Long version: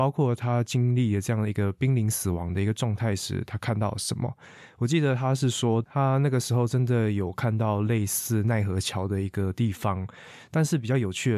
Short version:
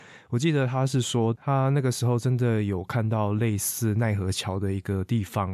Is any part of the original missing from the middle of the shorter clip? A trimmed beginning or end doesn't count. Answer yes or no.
no